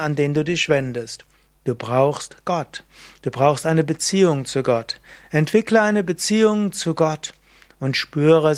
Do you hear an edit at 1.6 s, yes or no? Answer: no